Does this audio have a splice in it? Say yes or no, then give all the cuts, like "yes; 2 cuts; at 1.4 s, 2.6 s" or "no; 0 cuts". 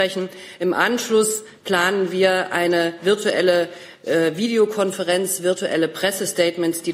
no; 0 cuts